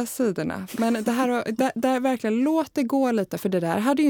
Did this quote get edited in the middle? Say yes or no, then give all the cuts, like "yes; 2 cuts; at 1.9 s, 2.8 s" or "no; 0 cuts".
no; 0 cuts